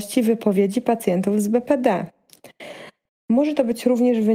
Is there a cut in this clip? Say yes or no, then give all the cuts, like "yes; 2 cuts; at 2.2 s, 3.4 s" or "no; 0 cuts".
yes; 1 cut; at 3.1 s